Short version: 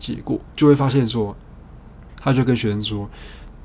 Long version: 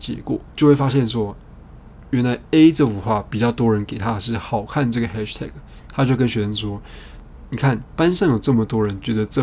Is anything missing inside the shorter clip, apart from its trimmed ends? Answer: yes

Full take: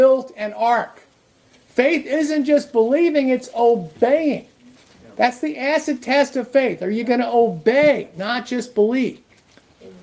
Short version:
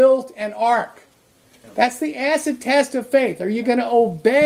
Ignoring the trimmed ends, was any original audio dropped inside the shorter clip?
yes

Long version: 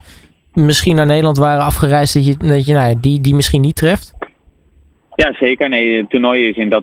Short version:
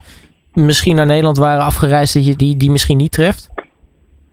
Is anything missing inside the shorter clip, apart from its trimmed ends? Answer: yes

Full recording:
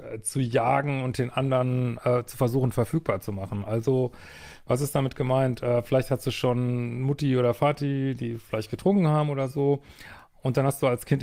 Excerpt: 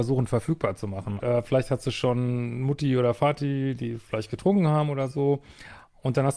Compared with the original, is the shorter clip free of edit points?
no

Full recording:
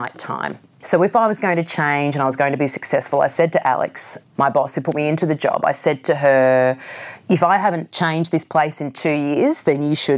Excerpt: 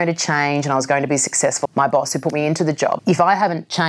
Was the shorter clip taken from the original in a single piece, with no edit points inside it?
no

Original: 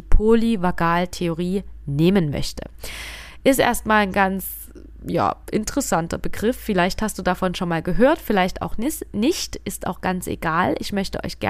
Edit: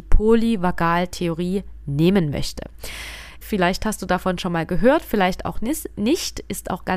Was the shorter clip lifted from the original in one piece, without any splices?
no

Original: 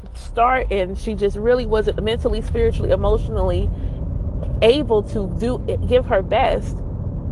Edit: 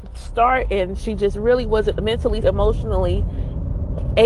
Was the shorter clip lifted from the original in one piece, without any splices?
no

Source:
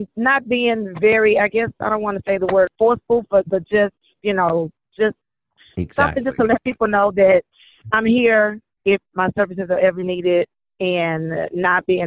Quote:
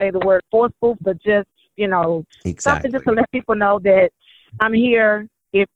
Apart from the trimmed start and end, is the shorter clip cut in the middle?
yes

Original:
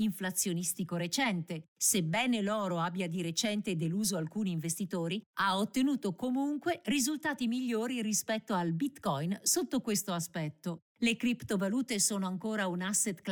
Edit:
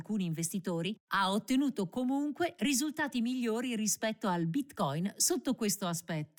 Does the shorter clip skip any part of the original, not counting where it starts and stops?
no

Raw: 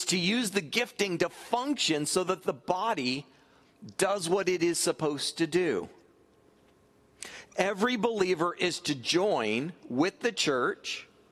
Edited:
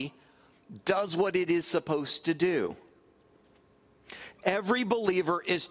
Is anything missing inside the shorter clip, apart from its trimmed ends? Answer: no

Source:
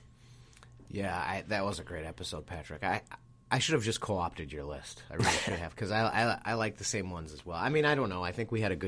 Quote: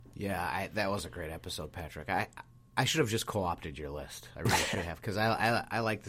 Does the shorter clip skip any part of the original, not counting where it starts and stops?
no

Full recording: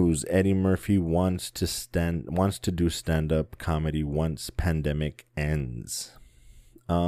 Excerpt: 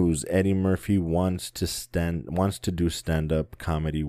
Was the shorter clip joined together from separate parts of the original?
no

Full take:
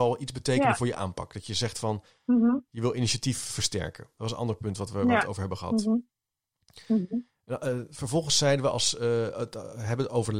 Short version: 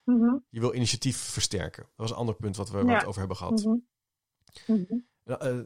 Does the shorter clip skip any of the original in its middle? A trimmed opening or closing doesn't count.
no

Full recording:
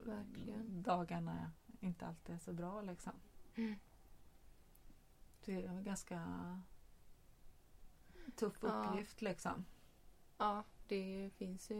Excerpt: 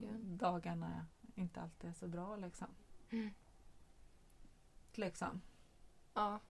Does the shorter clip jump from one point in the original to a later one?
yes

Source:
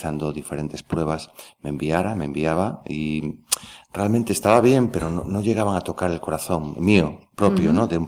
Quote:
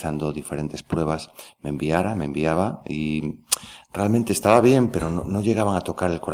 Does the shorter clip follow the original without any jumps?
yes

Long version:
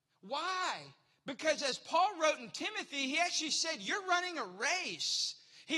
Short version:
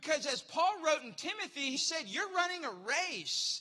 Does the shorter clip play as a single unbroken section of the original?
no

